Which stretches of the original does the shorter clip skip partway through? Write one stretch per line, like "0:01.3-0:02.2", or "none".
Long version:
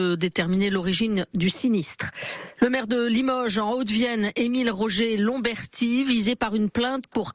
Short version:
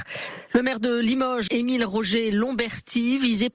0:03.5-0:04.3

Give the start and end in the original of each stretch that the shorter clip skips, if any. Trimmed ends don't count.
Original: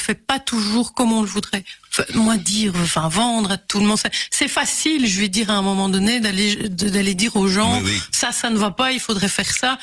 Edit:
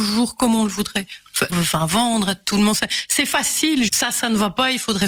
0:02.1-0:02.7
0:05.1-0:08.1

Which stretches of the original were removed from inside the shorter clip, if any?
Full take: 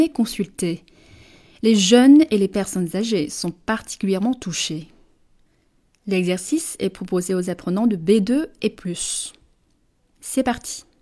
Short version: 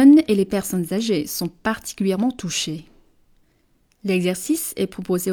none

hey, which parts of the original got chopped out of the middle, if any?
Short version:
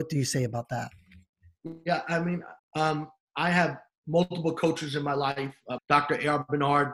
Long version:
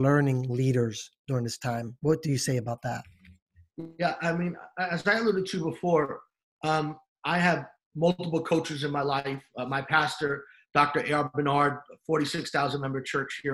0:04.7-0:06.5
0:09.7-0:10.6

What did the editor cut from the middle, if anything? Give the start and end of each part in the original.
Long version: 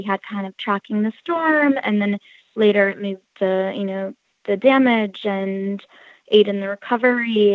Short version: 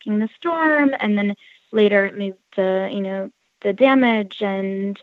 none

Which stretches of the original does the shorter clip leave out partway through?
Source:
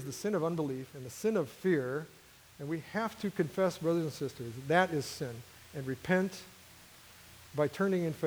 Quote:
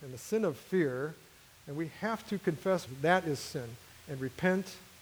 0:03.8-0:04.5

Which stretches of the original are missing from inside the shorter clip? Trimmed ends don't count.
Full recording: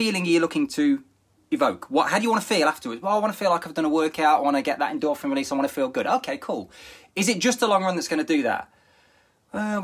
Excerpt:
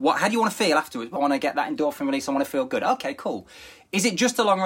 0:03.1-0:04.4

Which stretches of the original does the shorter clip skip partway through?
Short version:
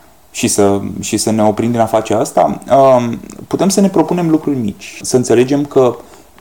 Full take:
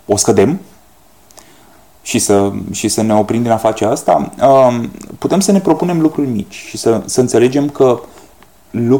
0:06.7-0:07.0

